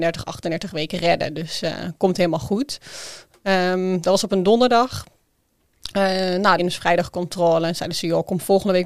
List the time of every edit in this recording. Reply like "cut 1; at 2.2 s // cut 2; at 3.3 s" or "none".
cut 1; at 6.6 s